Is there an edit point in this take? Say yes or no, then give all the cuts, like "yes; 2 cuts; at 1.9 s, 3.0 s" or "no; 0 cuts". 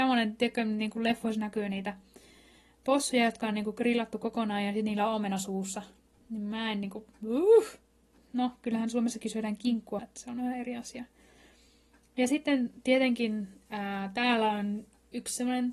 yes; 1 cut; at 10.0 s